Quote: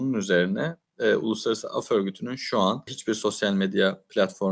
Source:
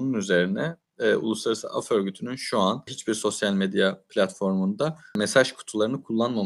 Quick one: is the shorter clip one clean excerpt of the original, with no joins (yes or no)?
yes